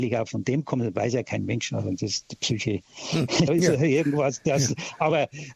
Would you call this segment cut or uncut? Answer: cut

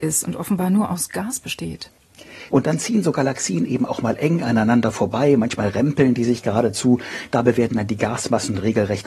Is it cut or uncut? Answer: cut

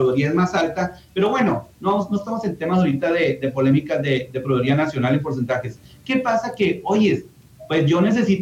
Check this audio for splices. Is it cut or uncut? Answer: uncut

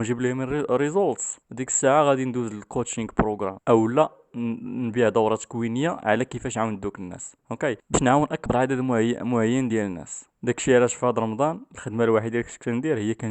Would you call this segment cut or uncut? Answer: uncut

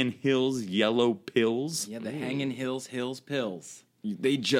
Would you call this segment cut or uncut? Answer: uncut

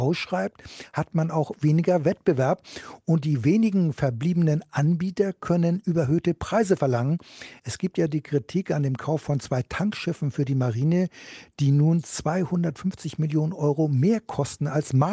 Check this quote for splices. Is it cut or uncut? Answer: uncut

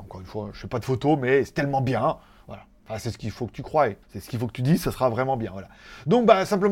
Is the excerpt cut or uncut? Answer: cut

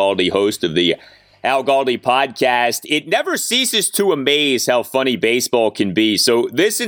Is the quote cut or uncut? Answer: uncut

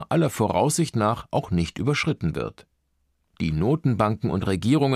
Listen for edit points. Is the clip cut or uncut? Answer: cut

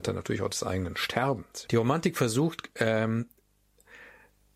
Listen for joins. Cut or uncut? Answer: cut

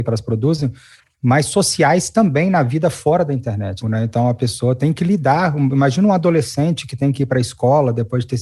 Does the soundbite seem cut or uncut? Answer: cut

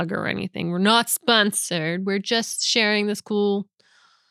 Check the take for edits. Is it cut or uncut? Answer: uncut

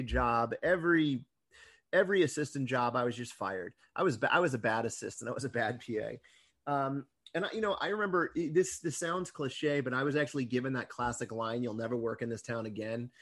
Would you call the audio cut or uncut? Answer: uncut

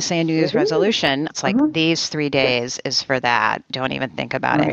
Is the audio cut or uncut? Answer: cut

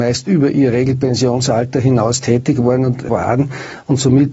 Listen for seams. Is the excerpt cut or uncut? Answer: cut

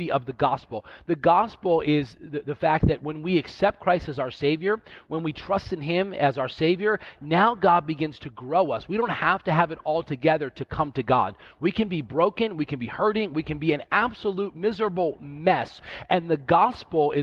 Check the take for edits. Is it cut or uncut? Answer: uncut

